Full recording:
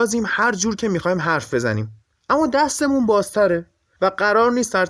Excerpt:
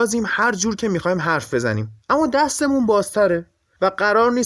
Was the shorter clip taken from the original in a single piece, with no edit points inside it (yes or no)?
no